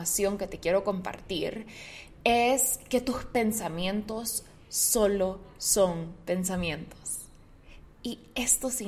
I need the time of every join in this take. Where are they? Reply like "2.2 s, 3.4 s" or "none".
none